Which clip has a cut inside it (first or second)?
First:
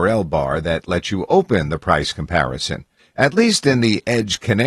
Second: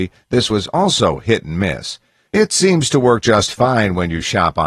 first